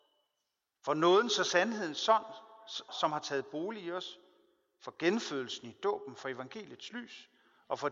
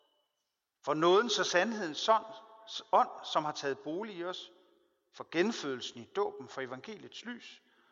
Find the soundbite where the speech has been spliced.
first; 1 cut; at 2.9 s

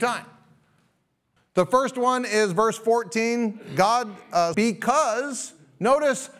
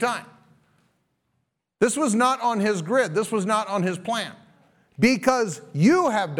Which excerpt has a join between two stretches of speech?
first; 2 cuts; at 1.4 s, 4.5 s

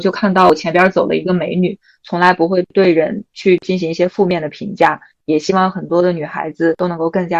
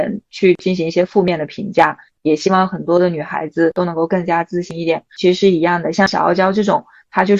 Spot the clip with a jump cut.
first; 1 cut; at 2.0 s

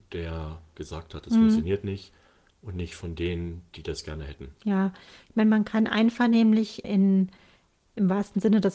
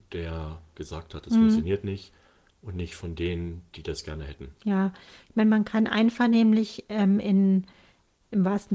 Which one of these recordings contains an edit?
first; 1 cut; at 6.8 s

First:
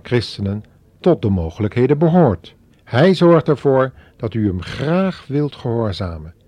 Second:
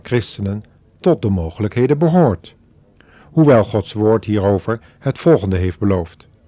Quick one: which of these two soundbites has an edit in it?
first; 1 cut; at 2.7 s

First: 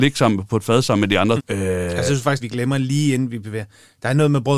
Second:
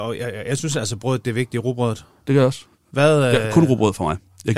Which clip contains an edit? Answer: first; 2 cuts; at 1.4 s, 2.4 s

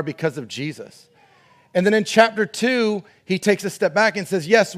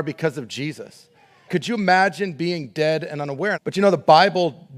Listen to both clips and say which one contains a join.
second; 2 cuts; at 1.5 s, 3.5 s

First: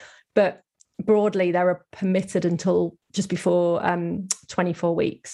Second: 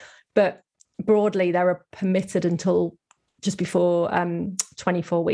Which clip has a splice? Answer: first; 1 cut; at 3.0 s

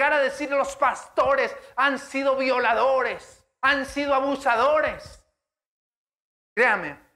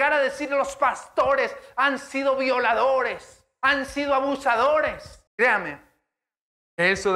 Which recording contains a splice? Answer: second; 1 cut; at 5.3 s

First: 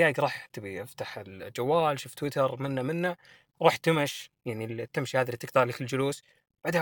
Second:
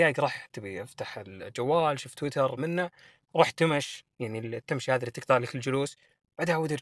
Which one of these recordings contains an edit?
second; 1 cut; at 2.6 s

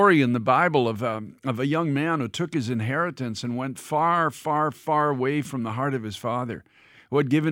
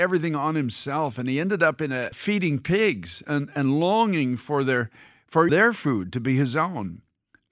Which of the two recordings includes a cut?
second; 2 cuts; at 2.1 s, 5.5 s

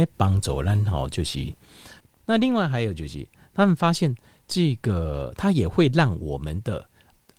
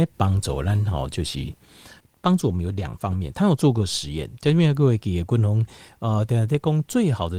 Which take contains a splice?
first; 1 cut; at 2.2 s

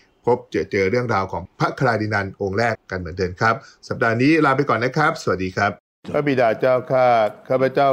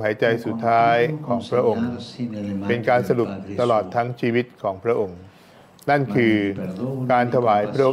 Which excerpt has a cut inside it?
first; 1 cut; at 2.7 s

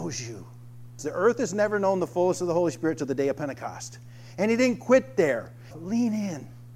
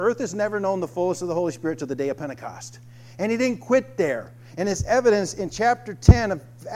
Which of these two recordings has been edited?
first; 2 cuts; at 1.0 s, 5.7 s

